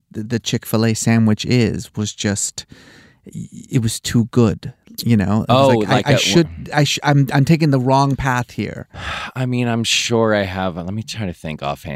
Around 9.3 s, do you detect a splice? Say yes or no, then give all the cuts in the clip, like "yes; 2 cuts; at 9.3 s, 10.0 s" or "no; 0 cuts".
no; 0 cuts